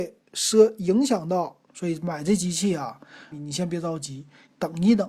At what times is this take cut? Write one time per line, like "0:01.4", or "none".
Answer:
0:01.7
0:03.3